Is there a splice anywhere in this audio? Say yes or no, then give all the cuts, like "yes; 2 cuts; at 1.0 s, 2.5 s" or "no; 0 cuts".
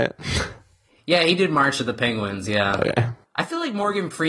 yes; 1 cut; at 3.2 s